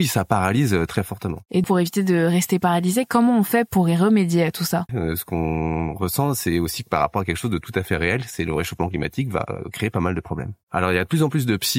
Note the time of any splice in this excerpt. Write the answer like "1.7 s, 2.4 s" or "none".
1.6 s, 4.9 s, 10.6 s